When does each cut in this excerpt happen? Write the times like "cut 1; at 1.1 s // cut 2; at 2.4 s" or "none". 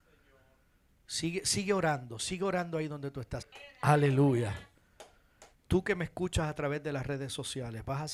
cut 1; at 3.4 s // cut 2; at 5.5 s

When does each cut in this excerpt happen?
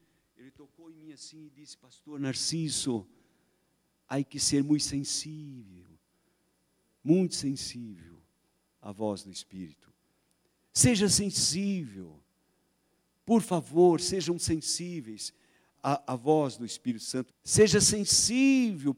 cut 1; at 15.7 s // cut 2; at 17.3 s

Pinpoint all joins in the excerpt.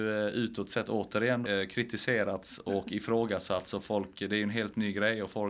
cut 1; at 1.4 s

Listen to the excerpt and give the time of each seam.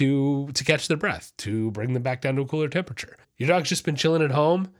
cut 1; at 3.2 s

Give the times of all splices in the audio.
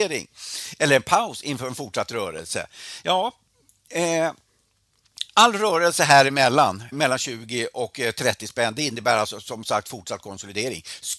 cut 1; at 6.9 s

